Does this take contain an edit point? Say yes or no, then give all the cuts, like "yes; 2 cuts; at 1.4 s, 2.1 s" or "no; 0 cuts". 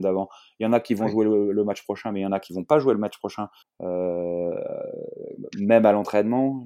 yes; 1 cut; at 3.6 s